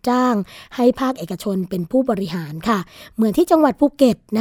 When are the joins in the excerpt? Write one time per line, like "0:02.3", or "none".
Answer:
none